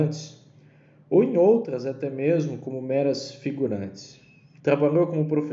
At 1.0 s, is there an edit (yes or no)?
no